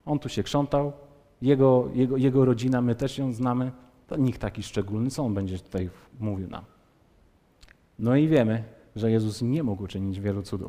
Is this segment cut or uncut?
uncut